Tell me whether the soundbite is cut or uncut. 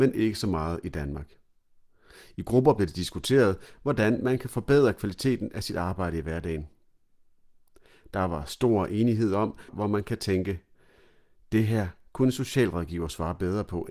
cut